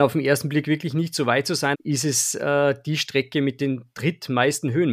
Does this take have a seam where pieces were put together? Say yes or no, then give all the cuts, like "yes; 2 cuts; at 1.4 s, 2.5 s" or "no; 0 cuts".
yes; 1 cut; at 1.7 s